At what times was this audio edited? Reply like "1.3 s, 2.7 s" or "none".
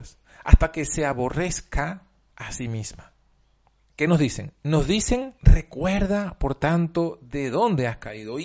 3.8 s, 5.4 s